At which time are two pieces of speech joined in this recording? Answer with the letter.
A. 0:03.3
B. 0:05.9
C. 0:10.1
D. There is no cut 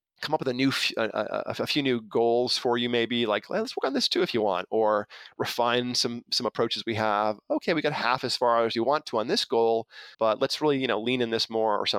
C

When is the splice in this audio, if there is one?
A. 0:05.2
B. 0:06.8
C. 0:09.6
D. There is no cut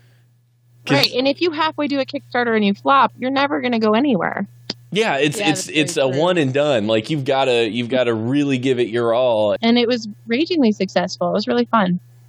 C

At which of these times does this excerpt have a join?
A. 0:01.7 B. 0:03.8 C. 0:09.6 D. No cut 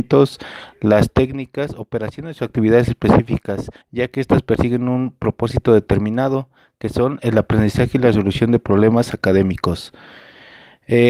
B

